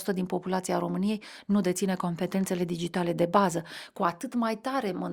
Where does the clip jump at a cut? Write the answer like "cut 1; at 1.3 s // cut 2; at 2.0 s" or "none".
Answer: none